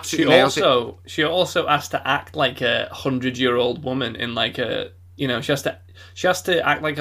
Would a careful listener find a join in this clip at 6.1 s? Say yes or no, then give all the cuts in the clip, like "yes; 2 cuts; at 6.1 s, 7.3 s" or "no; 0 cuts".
no; 0 cuts